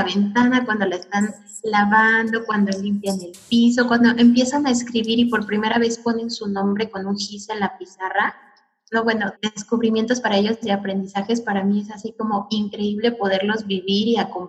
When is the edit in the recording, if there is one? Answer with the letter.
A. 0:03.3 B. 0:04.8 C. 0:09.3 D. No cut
C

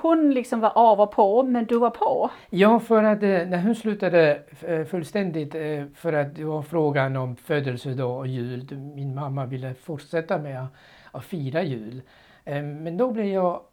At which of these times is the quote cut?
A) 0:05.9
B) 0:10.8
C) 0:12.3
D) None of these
D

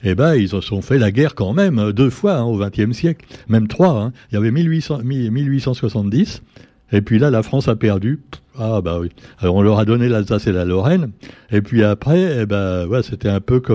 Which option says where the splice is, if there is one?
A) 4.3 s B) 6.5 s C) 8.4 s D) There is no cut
D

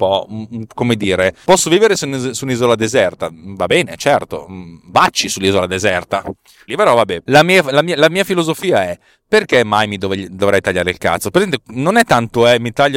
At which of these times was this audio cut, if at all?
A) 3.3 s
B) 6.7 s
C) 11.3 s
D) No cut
B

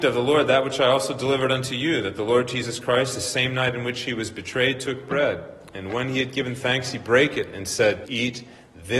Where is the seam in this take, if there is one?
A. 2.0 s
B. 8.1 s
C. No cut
B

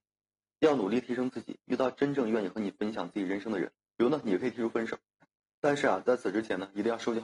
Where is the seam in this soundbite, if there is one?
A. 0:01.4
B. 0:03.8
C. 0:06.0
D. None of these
B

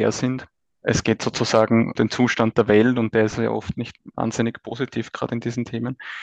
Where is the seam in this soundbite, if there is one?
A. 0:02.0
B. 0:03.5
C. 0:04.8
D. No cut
A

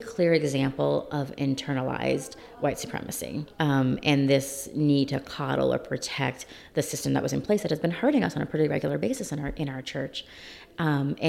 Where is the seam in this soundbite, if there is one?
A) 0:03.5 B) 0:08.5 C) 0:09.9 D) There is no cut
A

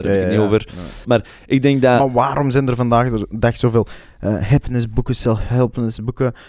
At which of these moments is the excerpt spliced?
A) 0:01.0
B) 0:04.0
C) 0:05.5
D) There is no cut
A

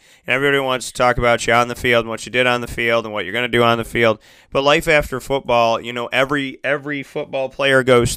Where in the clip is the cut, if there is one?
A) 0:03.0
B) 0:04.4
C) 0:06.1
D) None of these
D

